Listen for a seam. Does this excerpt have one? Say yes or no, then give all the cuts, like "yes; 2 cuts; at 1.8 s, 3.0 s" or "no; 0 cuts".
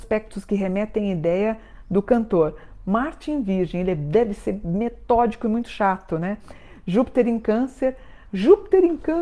no; 0 cuts